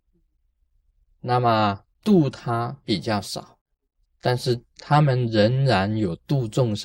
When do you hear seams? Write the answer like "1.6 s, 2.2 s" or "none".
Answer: 4.0 s